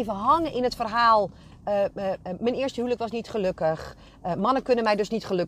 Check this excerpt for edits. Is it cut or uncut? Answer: uncut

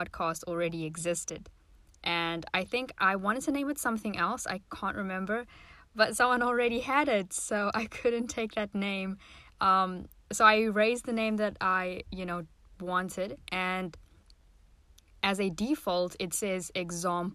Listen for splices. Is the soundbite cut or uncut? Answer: uncut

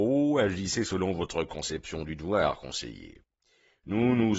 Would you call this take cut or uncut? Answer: uncut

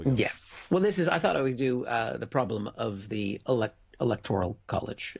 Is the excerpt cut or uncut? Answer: uncut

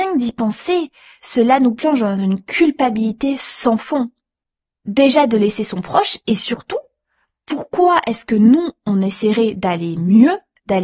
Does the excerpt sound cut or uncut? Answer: uncut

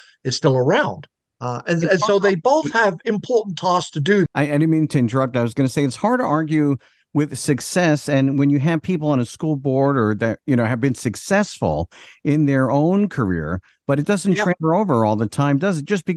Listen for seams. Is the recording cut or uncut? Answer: cut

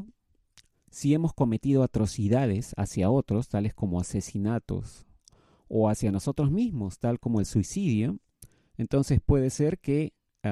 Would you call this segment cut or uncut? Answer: uncut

